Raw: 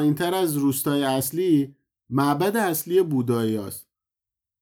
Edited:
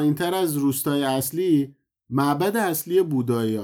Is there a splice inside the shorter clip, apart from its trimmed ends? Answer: no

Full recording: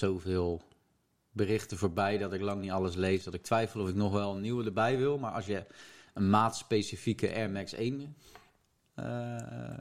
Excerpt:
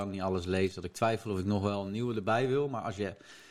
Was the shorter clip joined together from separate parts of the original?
no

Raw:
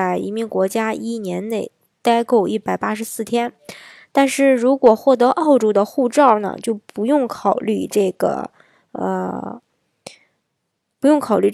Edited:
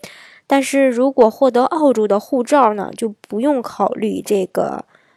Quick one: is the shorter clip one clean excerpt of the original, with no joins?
yes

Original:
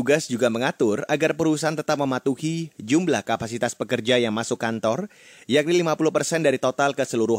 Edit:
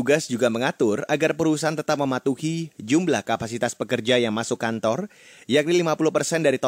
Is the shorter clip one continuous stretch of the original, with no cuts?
yes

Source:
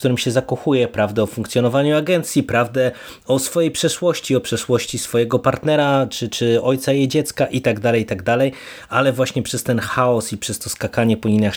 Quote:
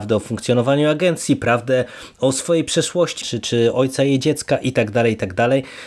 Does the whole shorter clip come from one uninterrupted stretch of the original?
no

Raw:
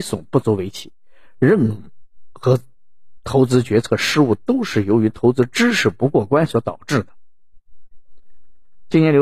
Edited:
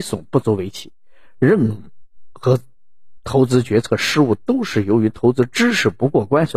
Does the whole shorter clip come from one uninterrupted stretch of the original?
yes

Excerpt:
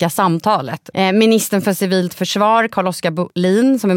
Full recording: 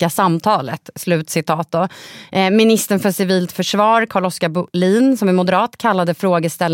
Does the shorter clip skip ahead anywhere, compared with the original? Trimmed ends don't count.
yes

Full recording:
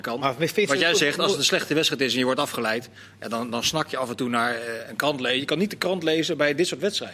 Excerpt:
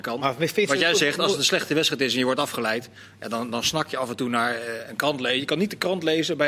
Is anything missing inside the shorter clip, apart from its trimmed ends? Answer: no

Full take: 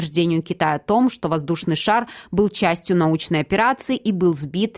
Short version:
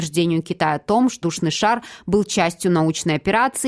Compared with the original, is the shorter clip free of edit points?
no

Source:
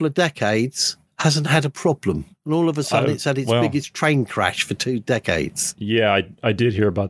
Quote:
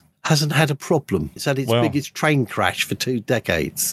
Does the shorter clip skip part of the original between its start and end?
yes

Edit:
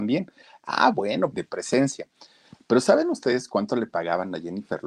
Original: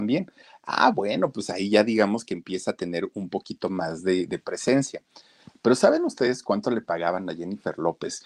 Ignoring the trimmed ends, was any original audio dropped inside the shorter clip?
yes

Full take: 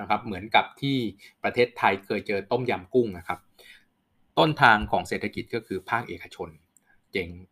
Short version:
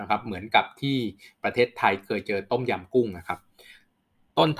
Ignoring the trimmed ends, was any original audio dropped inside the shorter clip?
no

